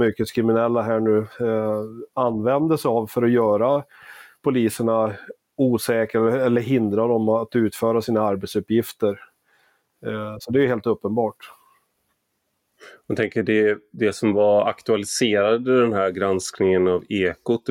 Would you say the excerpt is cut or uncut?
uncut